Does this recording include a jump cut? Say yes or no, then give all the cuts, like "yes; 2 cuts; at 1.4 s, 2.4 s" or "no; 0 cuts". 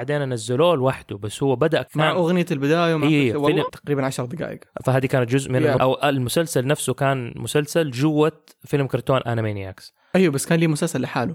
yes; 3 cuts; at 1.9 s, 3.7 s, 5.8 s